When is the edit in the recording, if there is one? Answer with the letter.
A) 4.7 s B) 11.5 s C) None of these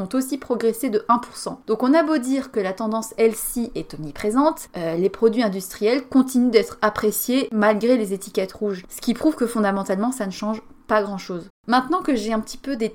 B